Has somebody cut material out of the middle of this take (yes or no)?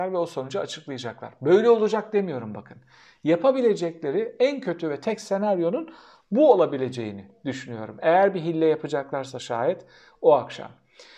no